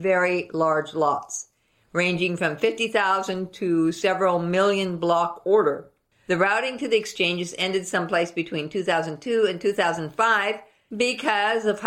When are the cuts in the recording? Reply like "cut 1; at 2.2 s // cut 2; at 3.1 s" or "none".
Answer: cut 1; at 6.1 s